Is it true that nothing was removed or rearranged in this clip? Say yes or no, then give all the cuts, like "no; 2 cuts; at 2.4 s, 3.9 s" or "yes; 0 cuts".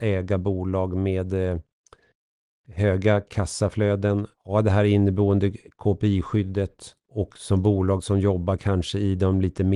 no; 2 cuts; at 4.3 s, 7.0 s